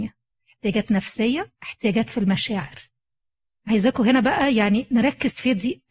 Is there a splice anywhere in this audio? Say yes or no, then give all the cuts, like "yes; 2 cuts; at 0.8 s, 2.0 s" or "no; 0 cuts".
yes; 1 cut; at 1.6 s